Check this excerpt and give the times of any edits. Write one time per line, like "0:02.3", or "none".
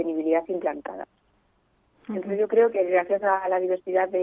none